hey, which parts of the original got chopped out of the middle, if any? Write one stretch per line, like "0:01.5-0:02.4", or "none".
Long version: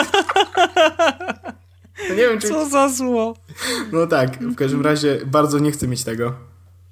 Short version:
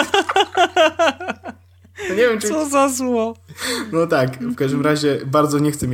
none